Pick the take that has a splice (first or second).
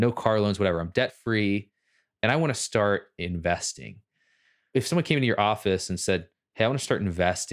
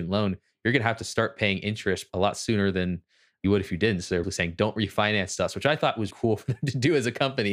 second